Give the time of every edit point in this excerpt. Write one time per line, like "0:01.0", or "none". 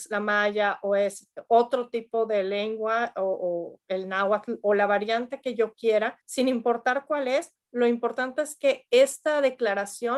0:06.2

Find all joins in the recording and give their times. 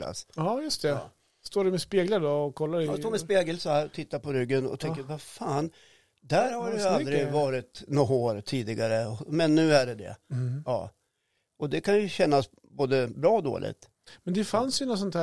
none

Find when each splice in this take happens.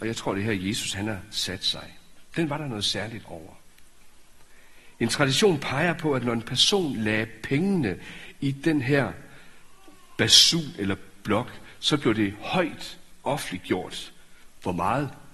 none

